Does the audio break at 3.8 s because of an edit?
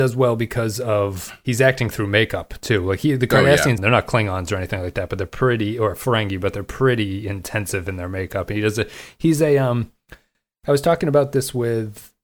yes; 1 cut; at 3.8 s

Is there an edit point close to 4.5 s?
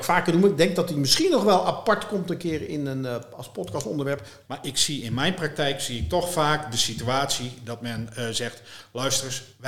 yes; 1 cut; at 4.5 s

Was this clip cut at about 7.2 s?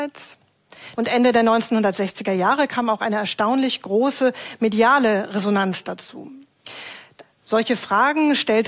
yes; 2 cuts; at 0.9 s, 7.2 s

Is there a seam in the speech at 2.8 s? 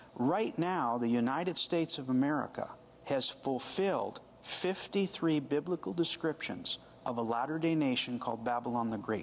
no; 0 cuts

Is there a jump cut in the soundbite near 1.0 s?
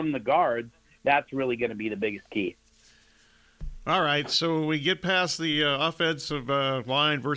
yes; 1 cut; at 1.0 s

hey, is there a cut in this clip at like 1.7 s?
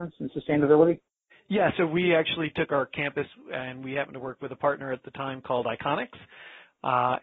yes; 1 cut; at 1.7 s

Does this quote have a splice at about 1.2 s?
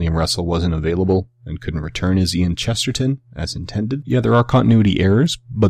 no; 1 cut; at 4.0 s

